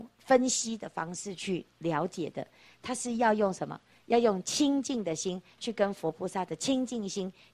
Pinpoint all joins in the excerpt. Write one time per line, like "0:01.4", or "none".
none